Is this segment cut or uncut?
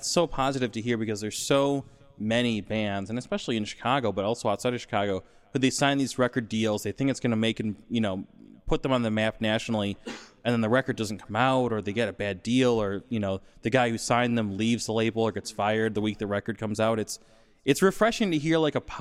uncut